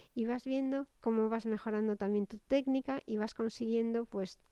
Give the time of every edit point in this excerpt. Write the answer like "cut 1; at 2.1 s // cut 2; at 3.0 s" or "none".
cut 1; at 0.9 s

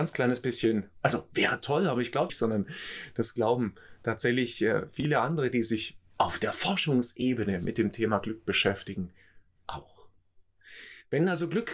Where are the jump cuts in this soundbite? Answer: cut 1; at 2.3 s

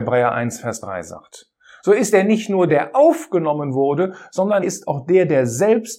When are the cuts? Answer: cut 1; at 2.7 s // cut 2; at 4.6 s

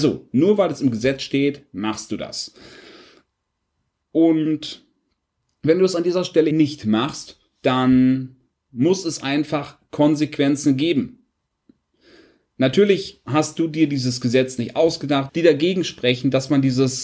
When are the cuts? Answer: cut 1; at 6.5 s // cut 2; at 15.3 s

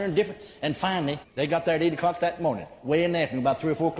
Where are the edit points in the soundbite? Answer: cut 1; at 1.2 s

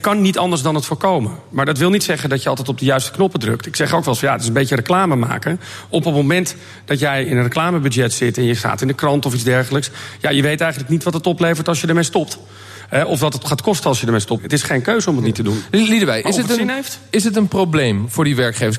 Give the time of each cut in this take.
cut 1; at 14.4 s

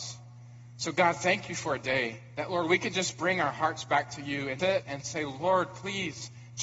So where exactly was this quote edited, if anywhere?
cut 1; at 4.6 s

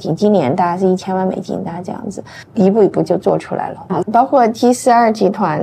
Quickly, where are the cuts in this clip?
cut 1; at 4.0 s

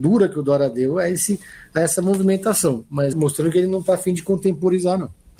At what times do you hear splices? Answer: cut 1; at 3.1 s

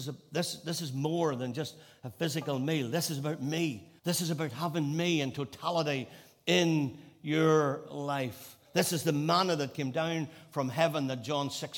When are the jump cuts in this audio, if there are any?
cut 1; at 4.0 s

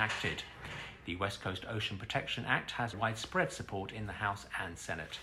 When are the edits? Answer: none

